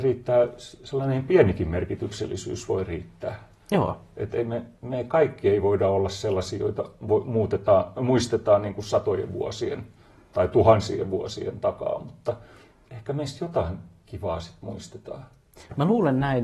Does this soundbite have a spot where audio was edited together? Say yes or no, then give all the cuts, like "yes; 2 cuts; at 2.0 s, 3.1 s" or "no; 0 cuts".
no; 0 cuts